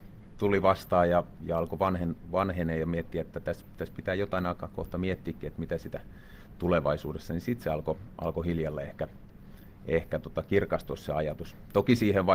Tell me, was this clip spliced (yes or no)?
no